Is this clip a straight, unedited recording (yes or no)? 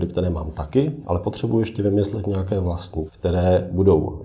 no